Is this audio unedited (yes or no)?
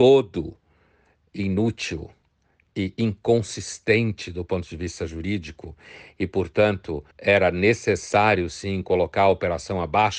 no